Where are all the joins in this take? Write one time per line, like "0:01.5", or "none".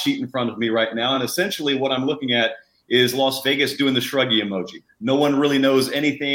none